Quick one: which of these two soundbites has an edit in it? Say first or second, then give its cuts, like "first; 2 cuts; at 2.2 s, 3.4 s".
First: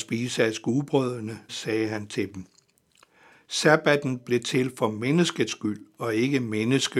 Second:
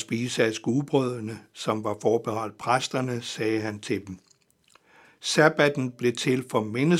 first; 1 cut; at 1.5 s